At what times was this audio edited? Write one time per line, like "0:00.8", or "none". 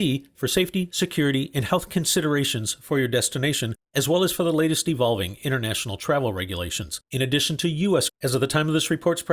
0:07.0
0:08.1